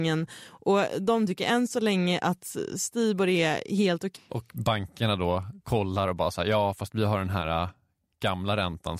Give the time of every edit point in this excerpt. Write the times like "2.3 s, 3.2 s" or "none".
4.1 s